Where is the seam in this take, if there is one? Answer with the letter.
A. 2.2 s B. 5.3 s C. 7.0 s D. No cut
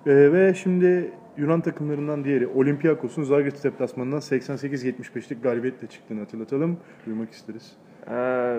C